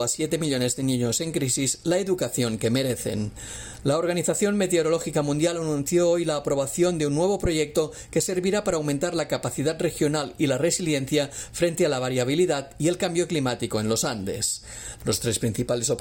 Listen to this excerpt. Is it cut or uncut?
cut